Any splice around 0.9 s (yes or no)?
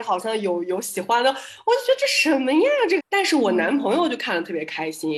no